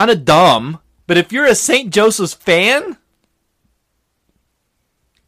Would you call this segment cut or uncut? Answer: cut